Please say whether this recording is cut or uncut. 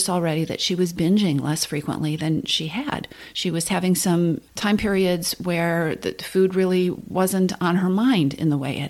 uncut